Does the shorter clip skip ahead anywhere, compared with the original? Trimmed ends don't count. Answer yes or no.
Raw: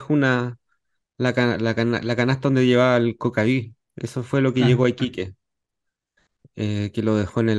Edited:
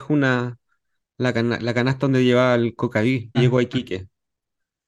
yes